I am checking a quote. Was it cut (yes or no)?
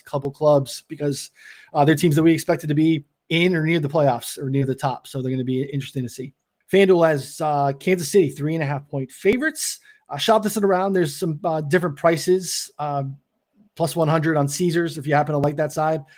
yes